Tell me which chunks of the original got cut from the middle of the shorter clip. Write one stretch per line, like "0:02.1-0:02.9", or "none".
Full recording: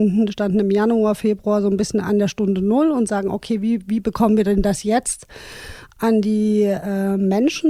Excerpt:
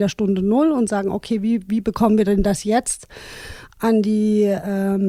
none